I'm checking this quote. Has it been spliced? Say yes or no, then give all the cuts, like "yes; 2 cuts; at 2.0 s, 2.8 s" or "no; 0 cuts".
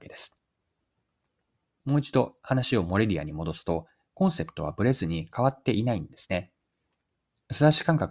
yes; 2 cuts; at 1.6 s, 4.1 s